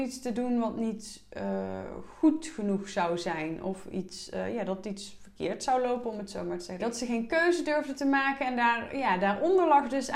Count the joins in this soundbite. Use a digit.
1